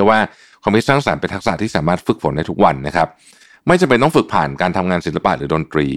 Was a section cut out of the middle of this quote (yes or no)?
no